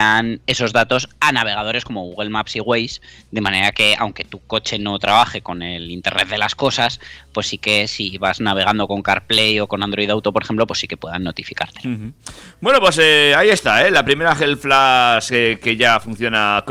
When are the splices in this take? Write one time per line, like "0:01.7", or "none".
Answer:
none